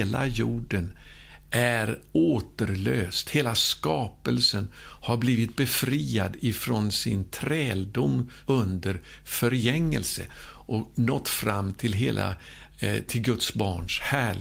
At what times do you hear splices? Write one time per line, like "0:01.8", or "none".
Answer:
0:08.4